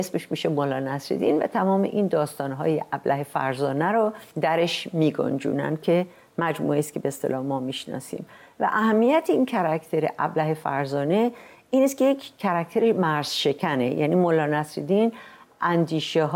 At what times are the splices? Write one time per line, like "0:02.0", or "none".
0:04.3